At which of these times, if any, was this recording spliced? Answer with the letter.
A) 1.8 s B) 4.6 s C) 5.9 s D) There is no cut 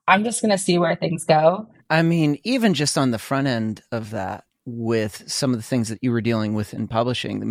A